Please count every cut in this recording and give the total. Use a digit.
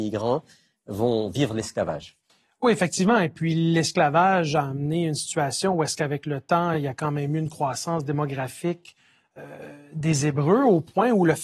0